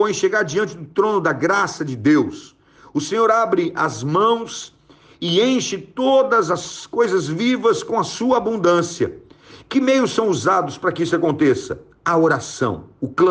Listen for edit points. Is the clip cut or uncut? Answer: uncut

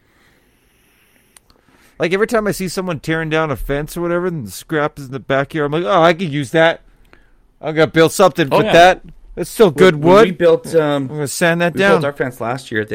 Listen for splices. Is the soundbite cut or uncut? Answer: uncut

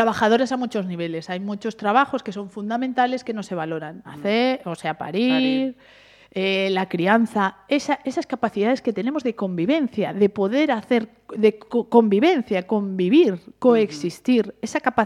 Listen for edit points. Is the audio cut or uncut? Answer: cut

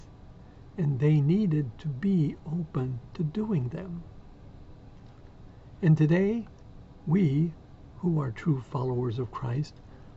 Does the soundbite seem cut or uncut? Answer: uncut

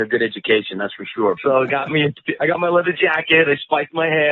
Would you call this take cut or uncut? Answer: cut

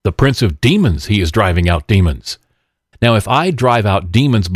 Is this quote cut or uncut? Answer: cut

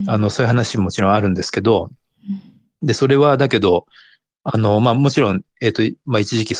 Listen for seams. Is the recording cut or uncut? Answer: uncut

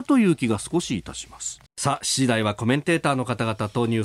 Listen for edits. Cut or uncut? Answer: cut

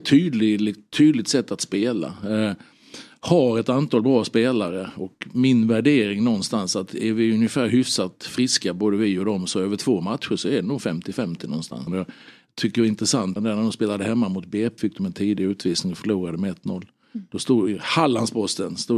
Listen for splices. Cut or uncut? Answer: cut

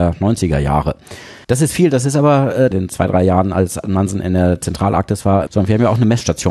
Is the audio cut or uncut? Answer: cut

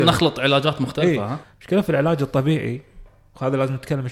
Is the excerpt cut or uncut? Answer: cut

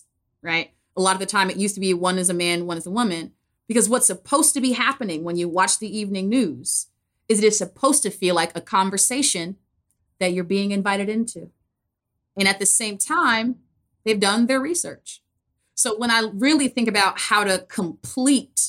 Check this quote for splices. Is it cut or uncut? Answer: cut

